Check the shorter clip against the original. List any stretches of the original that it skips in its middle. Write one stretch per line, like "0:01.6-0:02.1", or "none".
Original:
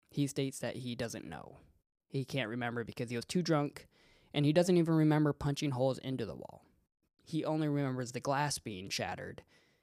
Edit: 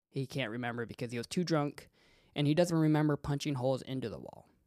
0:04.7-0:04.9